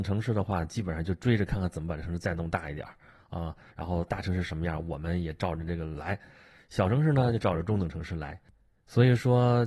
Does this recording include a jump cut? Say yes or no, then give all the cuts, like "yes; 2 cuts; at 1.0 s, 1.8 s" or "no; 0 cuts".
no; 0 cuts